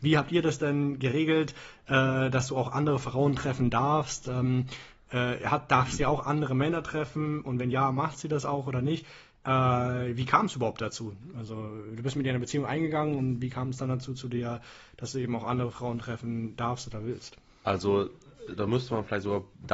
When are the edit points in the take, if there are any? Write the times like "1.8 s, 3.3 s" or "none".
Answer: none

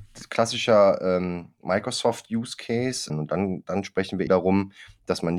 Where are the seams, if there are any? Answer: 3.1 s, 4.3 s

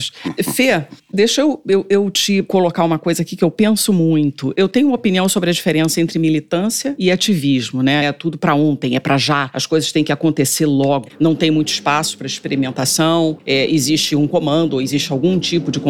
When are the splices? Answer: 8.0 s, 11.1 s

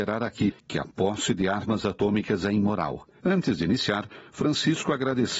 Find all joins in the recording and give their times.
3.2 s

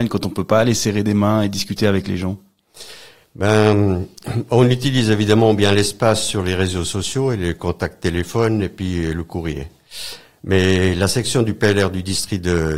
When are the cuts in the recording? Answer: none

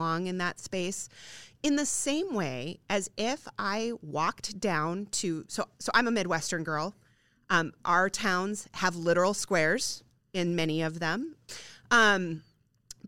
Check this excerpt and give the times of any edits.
11.5 s

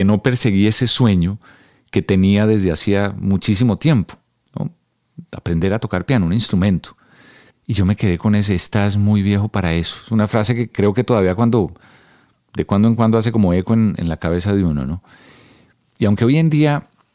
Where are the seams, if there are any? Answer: 7.5 s

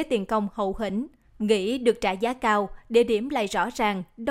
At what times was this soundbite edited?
1.3 s

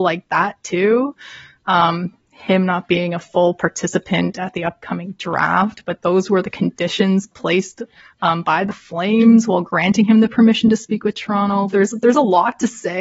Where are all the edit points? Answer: 2.2 s, 11.7 s

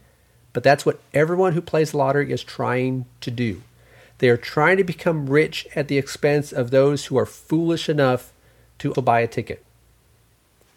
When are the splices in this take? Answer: 8.9 s

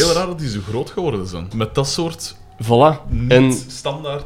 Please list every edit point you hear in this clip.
1.5 s

